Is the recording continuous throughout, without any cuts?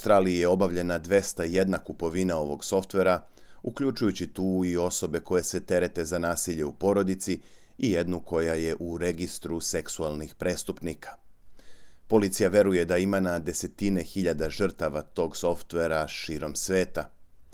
yes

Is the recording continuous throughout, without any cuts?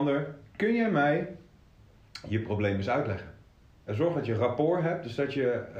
no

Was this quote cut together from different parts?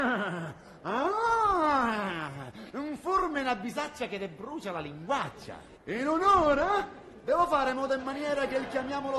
yes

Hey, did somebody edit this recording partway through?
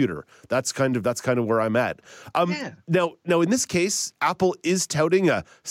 no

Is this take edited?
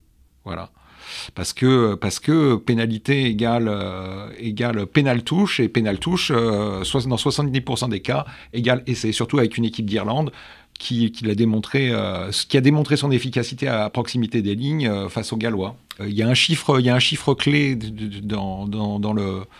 yes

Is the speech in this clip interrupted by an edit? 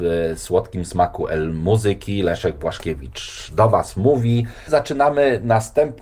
no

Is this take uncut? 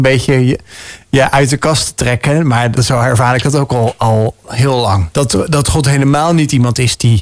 no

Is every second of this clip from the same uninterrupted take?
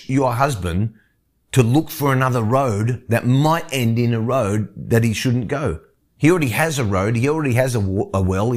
yes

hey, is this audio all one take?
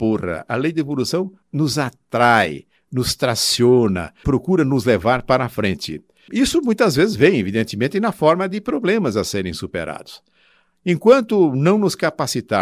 no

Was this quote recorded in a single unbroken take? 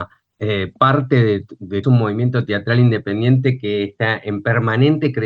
no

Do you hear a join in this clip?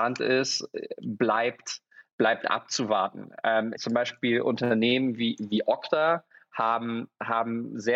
yes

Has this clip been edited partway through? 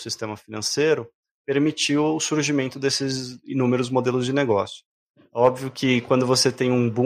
no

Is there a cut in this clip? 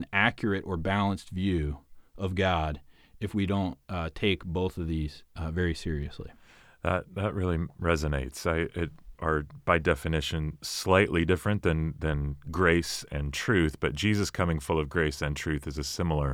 yes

